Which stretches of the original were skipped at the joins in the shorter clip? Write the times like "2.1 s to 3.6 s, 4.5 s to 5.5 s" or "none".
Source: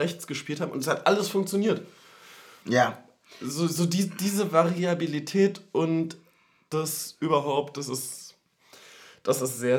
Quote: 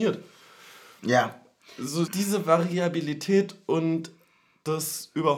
3.7 s to 4.1 s